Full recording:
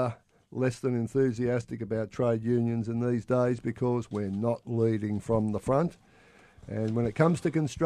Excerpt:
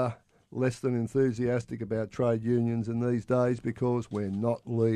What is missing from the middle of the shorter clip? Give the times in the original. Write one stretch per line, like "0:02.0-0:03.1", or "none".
none